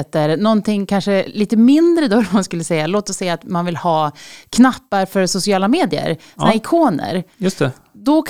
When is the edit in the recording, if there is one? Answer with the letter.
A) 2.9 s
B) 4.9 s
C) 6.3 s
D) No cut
D